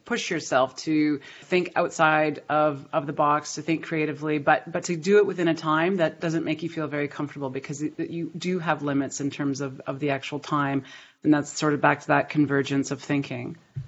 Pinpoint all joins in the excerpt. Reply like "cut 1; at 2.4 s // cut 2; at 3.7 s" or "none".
cut 1; at 1.4 s